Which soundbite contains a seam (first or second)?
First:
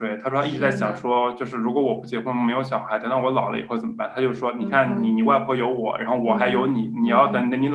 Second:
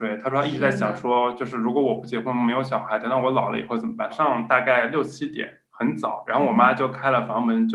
second